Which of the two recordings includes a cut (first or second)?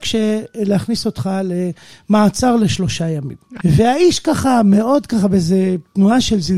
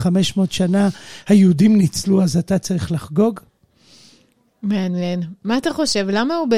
first